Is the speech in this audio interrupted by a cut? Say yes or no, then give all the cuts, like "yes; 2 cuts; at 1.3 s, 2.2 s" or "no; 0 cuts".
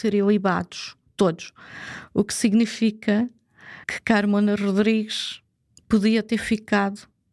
yes; 1 cut; at 3.8 s